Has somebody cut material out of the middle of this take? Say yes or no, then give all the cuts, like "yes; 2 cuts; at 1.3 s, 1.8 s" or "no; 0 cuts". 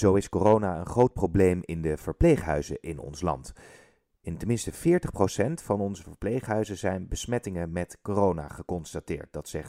no; 0 cuts